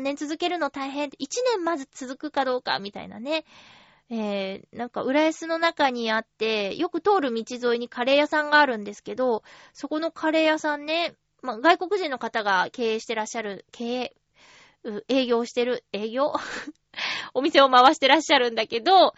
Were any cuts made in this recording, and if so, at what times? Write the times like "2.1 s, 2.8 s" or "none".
none